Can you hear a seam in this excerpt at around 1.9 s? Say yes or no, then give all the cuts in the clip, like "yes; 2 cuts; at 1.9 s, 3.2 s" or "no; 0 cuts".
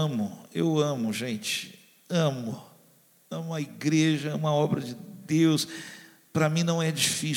no; 0 cuts